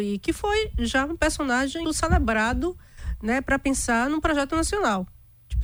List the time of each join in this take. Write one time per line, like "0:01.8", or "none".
0:01.8

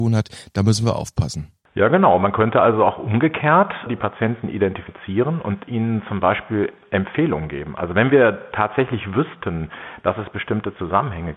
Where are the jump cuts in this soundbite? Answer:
0:03.9

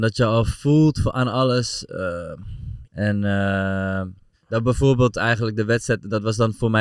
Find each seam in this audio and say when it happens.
0:02.8
0:04.3

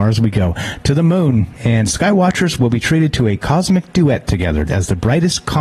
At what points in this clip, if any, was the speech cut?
0:01.5
0:04.7

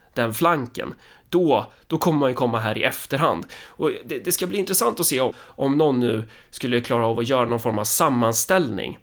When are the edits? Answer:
0:05.3

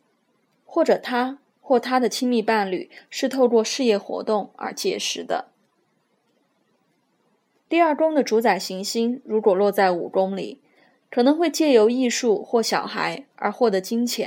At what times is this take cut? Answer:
none

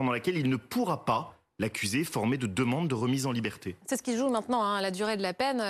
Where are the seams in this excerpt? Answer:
none

